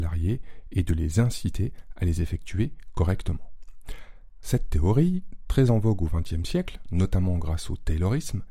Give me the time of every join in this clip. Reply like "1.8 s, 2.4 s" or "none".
4.4 s